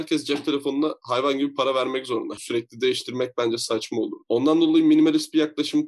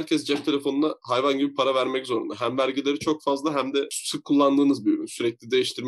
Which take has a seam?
first; 1 cut; at 2.4 s

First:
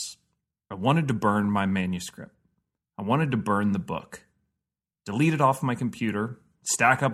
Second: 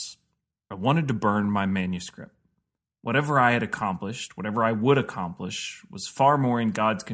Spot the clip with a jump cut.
second; 1 cut; at 2.9 s

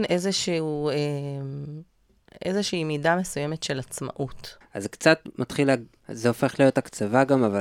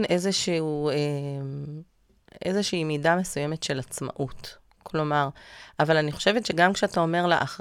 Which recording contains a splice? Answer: first; 2 cuts; at 4.6 s, 6.0 s

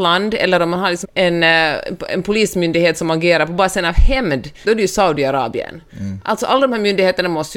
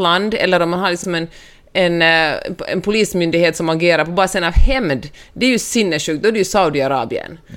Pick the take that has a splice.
first; 2 cuts; at 1.0 s, 4.6 s

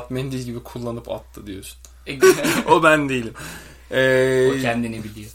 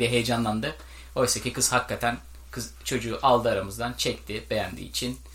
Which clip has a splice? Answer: first; 1 cut; at 2.2 s

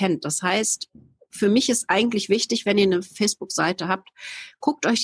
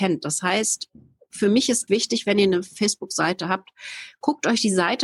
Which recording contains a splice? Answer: second; 1 cut; at 1.9 s

